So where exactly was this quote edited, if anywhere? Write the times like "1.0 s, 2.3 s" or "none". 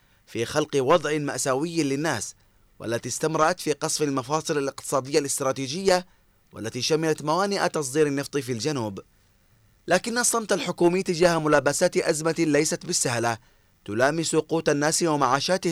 none